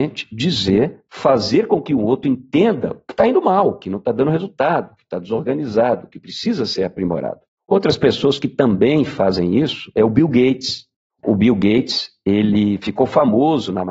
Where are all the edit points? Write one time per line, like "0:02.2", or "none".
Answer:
0:07.6